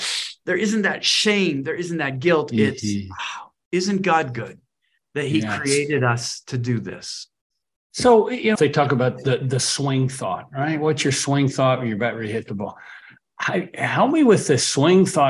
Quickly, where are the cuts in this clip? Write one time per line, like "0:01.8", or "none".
0:08.6